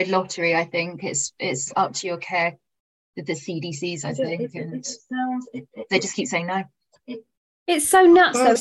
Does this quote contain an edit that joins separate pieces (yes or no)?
no